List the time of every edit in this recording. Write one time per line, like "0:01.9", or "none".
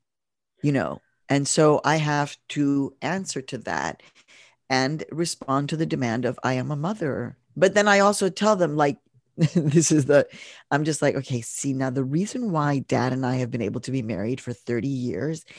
0:07.4